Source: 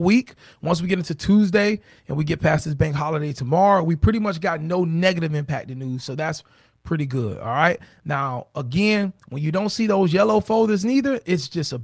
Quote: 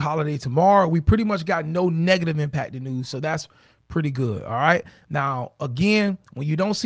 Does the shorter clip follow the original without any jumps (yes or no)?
yes